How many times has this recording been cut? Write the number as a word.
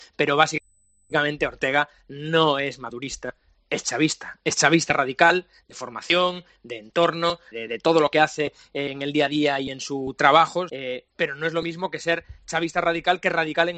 two